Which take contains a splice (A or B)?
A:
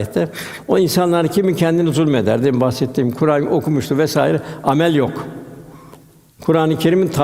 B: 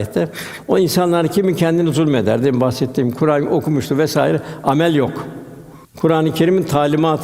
B